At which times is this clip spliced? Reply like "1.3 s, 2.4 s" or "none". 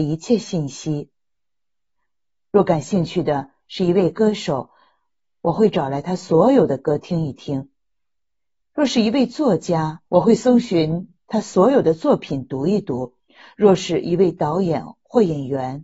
10.1 s

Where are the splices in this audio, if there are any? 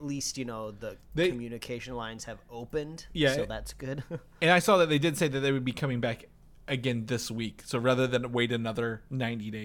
none

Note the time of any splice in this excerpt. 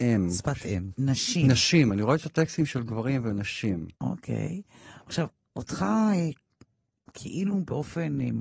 0.9 s

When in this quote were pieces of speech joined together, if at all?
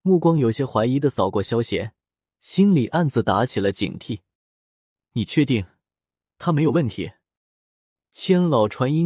none

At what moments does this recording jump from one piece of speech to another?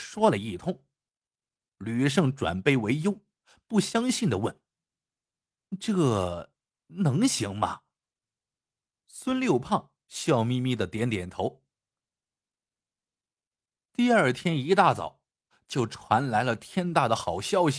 none

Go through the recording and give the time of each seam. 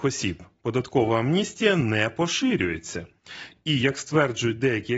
none

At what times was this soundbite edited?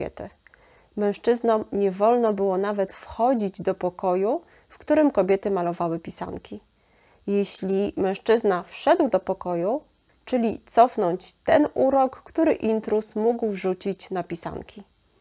10.1 s

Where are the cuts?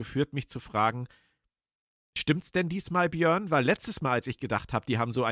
none

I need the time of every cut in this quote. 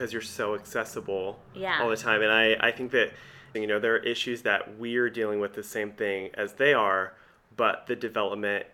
3.5 s

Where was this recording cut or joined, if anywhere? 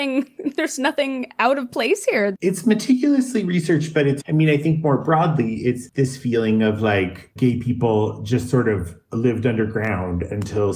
2.3 s, 4.2 s, 7.4 s

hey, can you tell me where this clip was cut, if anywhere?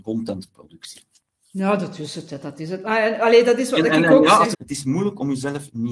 4.5 s

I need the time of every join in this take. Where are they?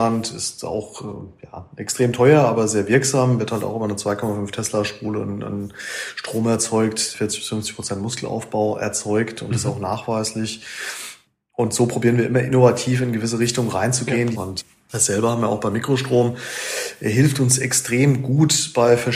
14.3 s

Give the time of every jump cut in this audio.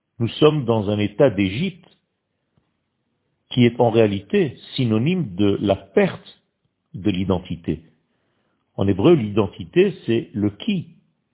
none

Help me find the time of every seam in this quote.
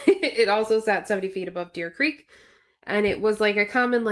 none

